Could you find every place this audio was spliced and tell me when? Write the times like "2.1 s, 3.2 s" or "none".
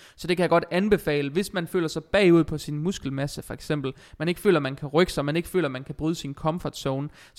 none